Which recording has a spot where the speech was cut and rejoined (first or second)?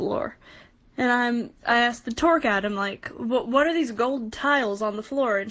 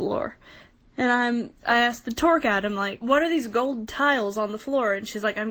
second